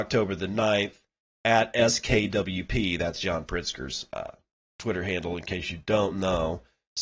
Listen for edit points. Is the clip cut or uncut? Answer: uncut